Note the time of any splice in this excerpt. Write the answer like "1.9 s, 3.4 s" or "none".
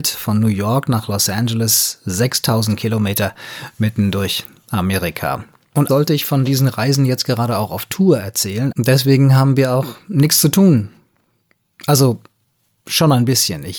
5.9 s, 8.7 s